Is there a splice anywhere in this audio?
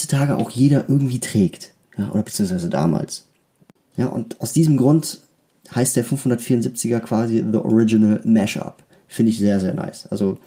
yes; 1 cut; at 3.8 s

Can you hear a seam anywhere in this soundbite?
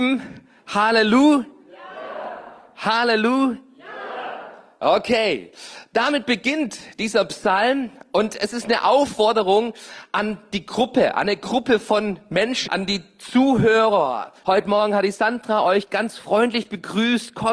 yes; 2 cuts; at 12.7 s, 14.4 s

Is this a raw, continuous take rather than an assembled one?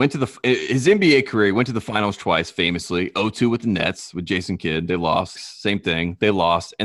no; 1 cut; at 5.3 s

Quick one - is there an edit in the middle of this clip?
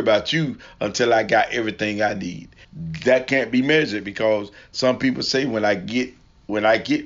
yes; 1 cut; at 2.6 s

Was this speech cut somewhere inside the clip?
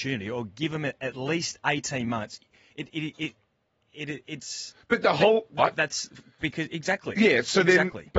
yes; 1 cut; at 5.6 s

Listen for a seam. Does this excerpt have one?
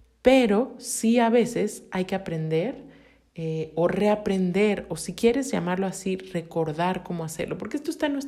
no; 0 cuts

